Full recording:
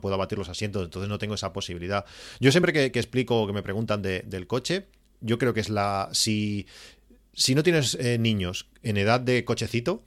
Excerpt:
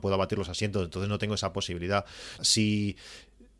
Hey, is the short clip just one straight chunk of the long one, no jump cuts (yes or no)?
no